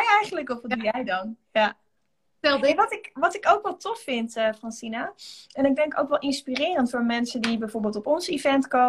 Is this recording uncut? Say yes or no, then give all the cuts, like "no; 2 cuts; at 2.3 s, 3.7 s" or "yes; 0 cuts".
yes; 0 cuts